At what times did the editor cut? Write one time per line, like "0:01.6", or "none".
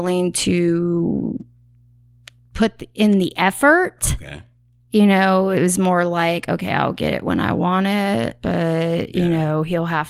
none